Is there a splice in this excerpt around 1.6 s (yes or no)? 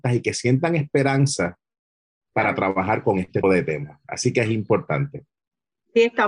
no